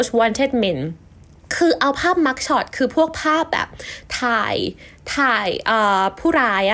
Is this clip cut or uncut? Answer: uncut